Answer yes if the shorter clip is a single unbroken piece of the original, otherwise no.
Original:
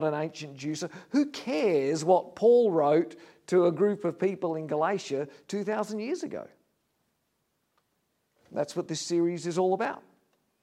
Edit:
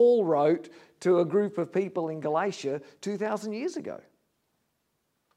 yes